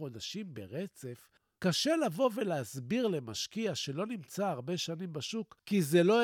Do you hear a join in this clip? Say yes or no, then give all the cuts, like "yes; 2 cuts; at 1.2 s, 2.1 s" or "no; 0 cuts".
no; 0 cuts